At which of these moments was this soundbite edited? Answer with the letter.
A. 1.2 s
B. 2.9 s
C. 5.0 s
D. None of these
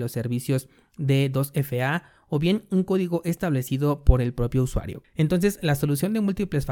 C